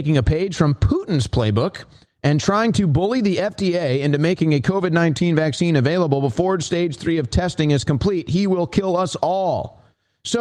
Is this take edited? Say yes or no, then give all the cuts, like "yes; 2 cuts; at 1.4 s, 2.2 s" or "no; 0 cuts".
no; 0 cuts